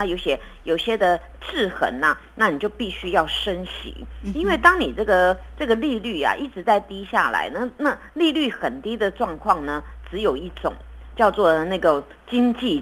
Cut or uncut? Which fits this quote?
uncut